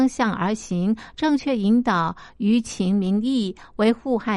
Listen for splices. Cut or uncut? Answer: uncut